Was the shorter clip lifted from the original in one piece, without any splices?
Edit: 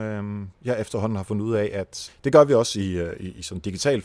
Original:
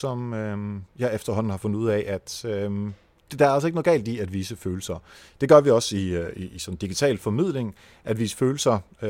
no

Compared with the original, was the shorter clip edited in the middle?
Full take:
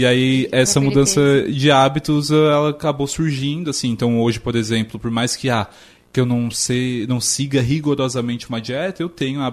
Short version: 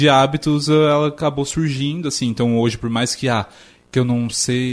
yes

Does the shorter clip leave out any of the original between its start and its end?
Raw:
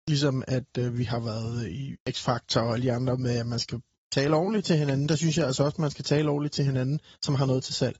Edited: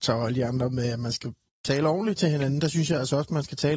no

